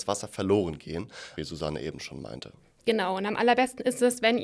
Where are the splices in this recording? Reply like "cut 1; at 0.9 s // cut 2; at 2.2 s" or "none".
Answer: cut 1; at 1.4 s